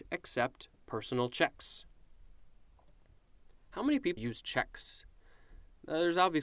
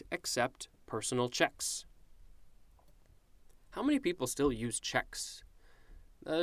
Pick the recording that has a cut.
first; 1 cut; at 4.2 s

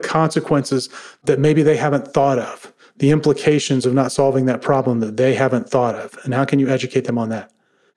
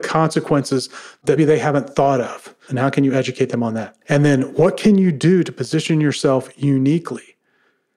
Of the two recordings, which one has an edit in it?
second; 3 cuts; at 1.4 s, 2.7 s, 4.0 s

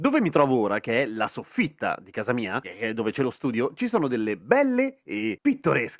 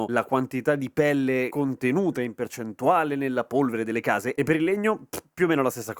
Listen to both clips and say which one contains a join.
second; 1 cut; at 4.3 s

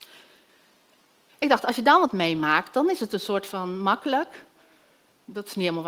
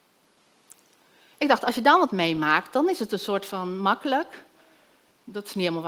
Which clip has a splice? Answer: first; 1 cut; at 1.3 s

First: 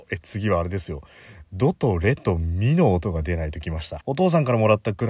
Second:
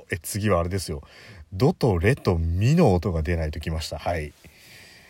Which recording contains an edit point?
first; 1 cut; at 4.0 s

